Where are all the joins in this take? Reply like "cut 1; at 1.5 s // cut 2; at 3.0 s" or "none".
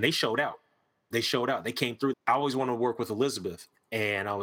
cut 1; at 2.1 s